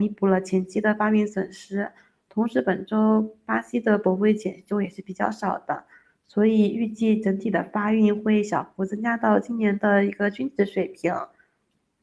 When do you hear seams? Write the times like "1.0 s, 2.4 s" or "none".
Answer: none